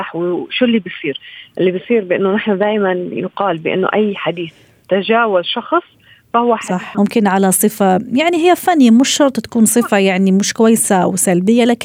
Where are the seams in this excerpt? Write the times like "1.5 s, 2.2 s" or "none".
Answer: 6.9 s